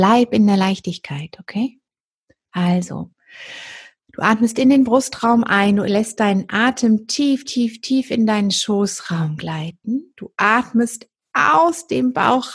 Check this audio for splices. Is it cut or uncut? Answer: uncut